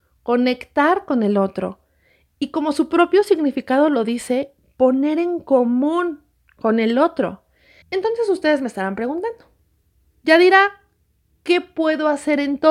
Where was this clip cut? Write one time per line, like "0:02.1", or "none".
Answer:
0:07.8